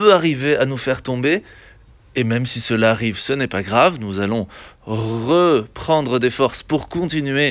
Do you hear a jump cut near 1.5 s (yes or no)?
no